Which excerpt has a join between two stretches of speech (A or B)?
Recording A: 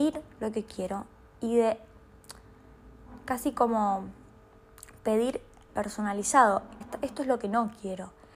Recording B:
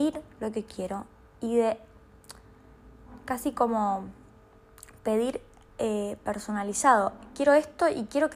A